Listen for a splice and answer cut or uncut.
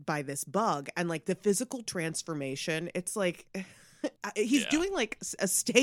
uncut